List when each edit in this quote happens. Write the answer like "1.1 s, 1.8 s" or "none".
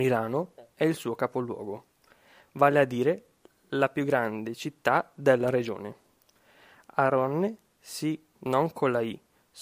8.4 s